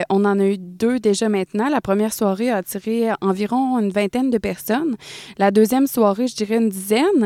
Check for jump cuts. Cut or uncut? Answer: uncut